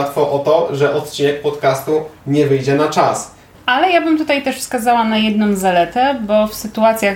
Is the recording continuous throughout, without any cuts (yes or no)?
no